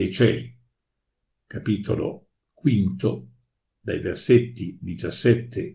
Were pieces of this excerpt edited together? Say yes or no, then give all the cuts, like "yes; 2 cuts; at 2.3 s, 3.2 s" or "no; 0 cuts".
yes; 1 cut; at 1.3 s